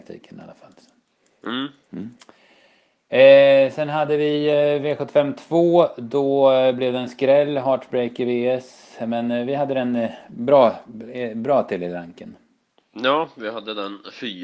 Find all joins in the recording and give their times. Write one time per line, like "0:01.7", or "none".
none